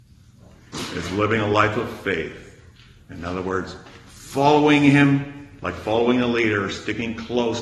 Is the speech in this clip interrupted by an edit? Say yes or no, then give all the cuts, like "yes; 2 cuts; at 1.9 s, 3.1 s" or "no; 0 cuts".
no; 0 cuts